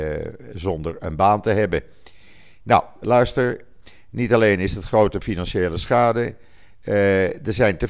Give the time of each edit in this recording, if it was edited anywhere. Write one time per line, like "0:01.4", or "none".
0:03.0